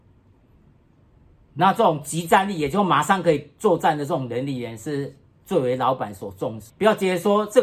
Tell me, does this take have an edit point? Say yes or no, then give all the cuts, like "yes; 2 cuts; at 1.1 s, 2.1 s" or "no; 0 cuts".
yes; 1 cut; at 6.7 s